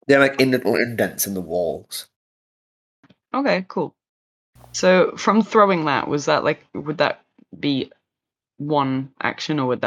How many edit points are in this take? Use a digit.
0